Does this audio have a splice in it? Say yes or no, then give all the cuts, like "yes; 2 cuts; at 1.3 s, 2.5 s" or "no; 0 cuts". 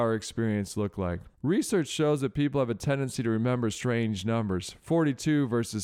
yes; 1 cut; at 1.3 s